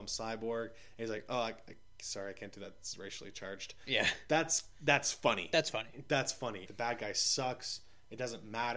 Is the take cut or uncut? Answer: cut